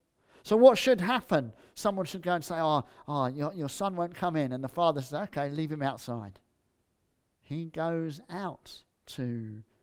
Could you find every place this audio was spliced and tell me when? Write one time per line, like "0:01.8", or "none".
0:07.3

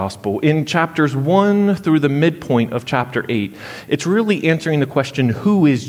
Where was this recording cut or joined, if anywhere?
none

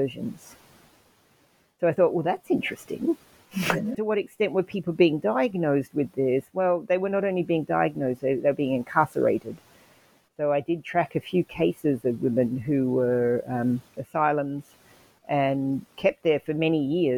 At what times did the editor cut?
0:03.9
0:14.0

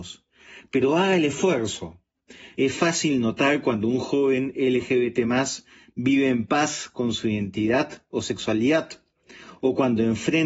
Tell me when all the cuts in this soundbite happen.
0:02.5

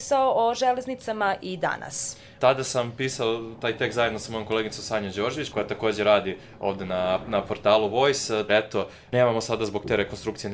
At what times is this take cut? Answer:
0:05.5
0:08.5

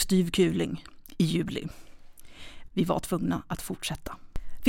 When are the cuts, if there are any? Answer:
0:02.7

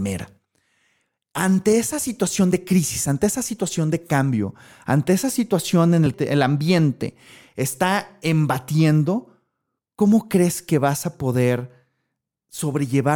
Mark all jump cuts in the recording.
none

